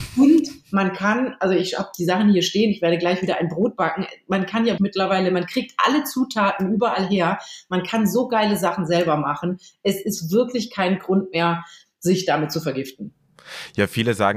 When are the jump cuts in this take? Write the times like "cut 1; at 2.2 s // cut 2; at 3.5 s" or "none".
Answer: cut 1; at 4.8 s